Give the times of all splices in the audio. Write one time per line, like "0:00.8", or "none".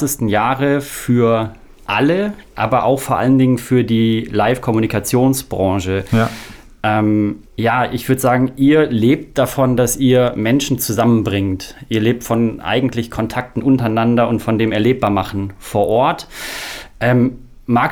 0:07.5